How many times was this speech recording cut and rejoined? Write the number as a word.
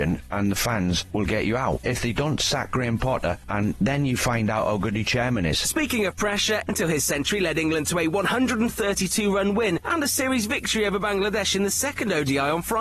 two